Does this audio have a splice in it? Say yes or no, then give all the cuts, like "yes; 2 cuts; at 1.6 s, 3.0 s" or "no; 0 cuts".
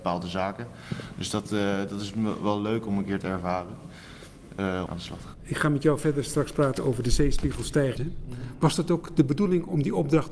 yes; 2 cuts; at 4.9 s, 8.0 s